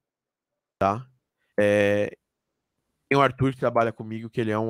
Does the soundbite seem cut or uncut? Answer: cut